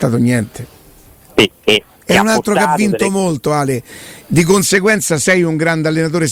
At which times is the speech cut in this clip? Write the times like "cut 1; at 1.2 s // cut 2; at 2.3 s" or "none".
cut 1; at 1.5 s